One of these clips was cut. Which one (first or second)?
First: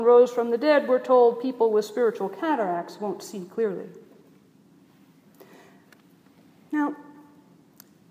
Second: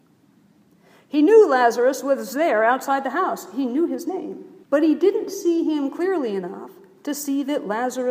second